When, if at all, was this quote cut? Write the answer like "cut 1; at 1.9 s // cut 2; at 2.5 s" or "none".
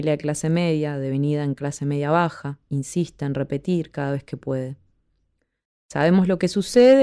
none

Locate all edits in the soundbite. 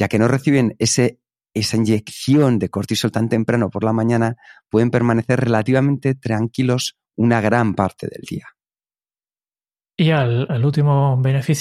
cut 1; at 10.5 s

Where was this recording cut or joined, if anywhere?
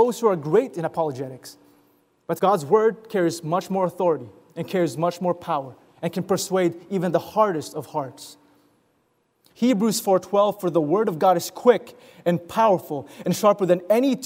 cut 1; at 2.4 s // cut 2; at 9.5 s

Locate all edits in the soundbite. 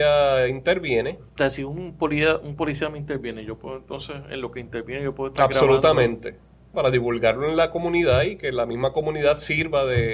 cut 1; at 6.7 s

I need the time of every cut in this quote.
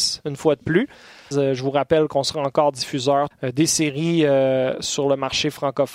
cut 1; at 1.3 s // cut 2; at 3.3 s

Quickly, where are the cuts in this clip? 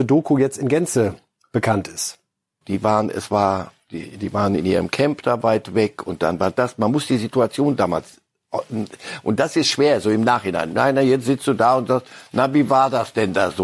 cut 1; at 2.6 s

